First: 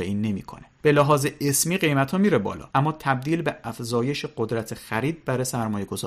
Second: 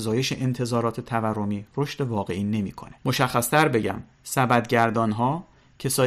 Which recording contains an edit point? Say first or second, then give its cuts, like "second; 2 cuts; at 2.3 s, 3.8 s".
second; 1 cut; at 3.0 s